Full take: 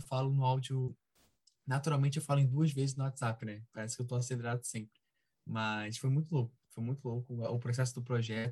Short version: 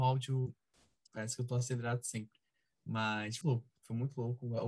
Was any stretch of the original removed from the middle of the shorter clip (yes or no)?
yes